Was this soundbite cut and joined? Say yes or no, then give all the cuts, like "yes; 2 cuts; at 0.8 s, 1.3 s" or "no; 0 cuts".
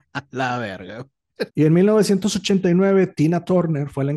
yes; 1 cut; at 1.5 s